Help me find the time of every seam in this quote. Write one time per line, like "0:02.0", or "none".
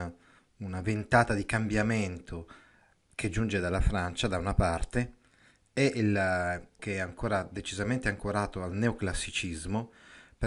0:06.8